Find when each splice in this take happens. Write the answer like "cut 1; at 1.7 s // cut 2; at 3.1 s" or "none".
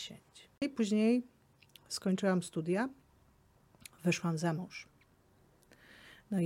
none